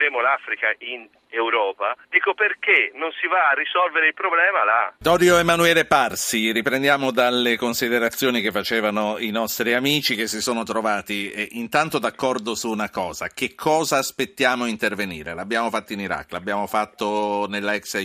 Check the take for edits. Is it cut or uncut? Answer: cut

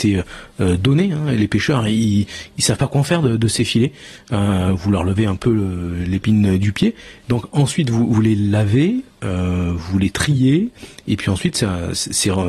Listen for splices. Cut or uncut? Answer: uncut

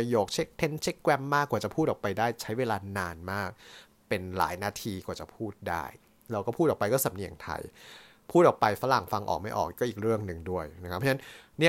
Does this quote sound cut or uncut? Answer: uncut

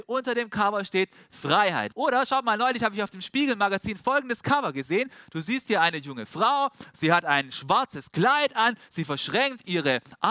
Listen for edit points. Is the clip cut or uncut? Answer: cut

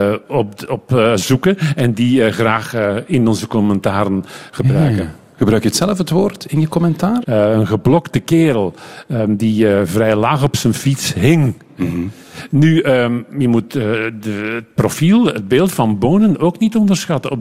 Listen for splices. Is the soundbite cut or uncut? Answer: cut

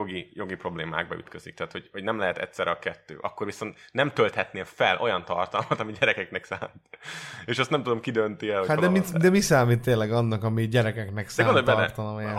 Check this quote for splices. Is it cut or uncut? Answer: uncut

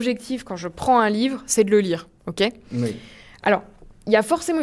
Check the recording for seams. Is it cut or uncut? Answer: uncut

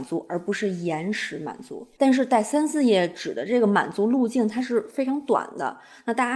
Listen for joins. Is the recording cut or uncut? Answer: cut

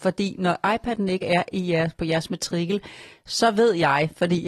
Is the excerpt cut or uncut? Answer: uncut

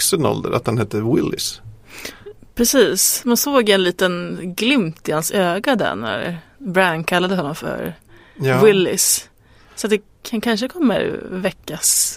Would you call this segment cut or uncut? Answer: cut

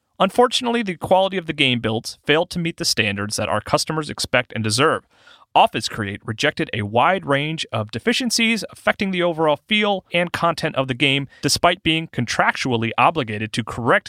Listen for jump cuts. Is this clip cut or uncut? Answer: cut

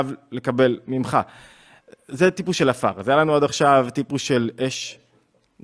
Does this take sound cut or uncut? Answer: uncut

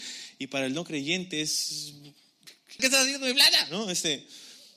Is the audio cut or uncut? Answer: cut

